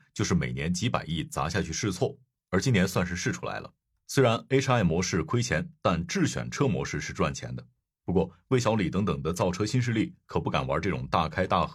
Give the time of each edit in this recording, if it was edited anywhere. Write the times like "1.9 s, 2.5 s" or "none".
none